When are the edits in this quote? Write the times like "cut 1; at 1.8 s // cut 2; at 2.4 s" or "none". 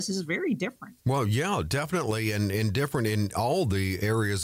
cut 1; at 1.0 s